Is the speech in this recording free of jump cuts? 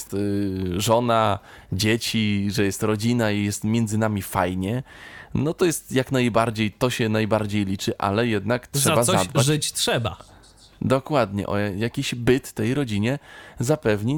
yes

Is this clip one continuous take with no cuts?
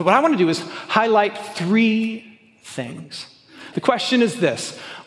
no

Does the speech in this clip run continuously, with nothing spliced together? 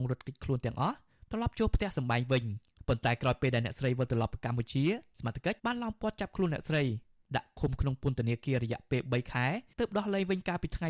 no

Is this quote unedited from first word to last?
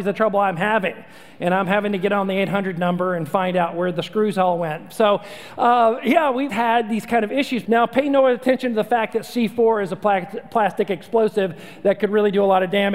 no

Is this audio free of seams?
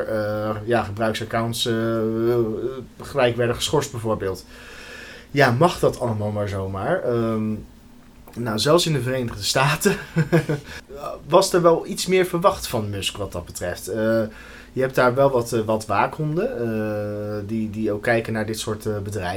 yes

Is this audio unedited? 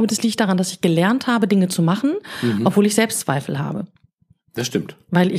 yes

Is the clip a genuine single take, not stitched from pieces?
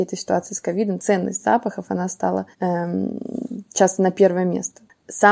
no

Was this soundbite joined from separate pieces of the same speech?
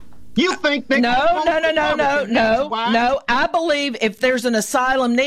no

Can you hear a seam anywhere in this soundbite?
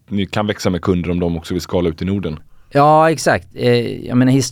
no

